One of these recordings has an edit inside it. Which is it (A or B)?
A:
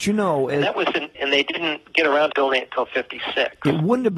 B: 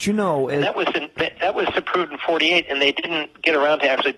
A